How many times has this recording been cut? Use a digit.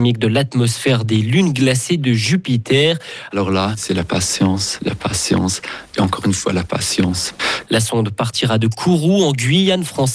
2